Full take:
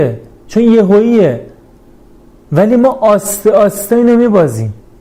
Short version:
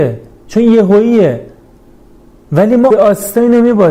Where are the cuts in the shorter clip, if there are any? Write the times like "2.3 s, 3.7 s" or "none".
2.9 s